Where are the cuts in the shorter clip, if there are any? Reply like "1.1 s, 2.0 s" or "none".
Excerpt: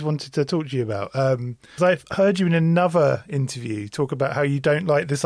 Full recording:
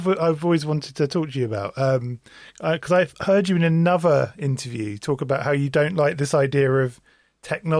1.8 s